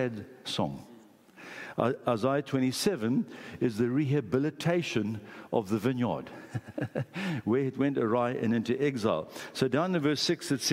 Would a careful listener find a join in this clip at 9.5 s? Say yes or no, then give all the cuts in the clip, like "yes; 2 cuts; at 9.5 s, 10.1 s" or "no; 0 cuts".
no; 0 cuts